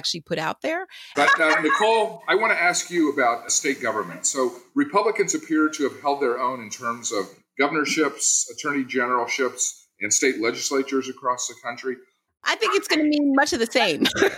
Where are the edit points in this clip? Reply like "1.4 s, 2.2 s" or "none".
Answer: 1.1 s, 12.3 s